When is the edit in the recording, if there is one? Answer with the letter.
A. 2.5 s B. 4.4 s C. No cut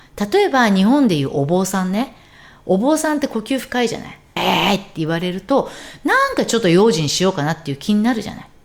B